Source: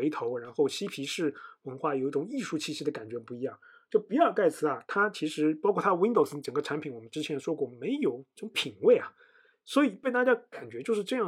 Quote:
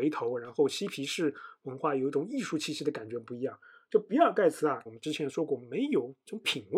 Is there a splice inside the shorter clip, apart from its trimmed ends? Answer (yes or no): yes